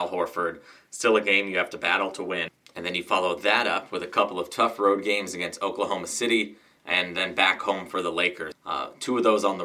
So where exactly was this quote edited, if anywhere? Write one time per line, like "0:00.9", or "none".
0:06.8
0:08.5